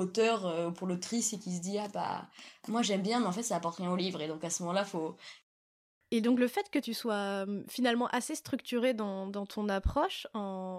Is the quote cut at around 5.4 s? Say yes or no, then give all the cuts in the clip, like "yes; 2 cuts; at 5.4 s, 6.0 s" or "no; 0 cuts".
yes; 1 cut; at 5.4 s